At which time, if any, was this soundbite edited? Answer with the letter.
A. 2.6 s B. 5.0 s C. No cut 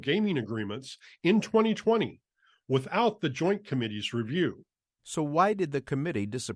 B